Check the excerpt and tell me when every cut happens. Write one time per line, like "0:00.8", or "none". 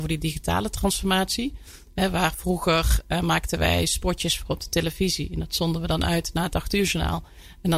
none